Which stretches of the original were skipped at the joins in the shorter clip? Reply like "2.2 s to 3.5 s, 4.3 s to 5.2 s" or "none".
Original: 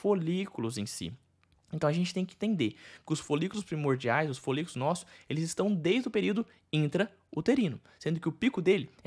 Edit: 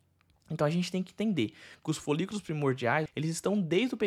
4.3 s to 5.2 s